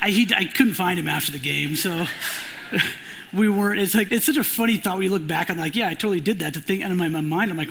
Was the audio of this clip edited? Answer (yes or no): yes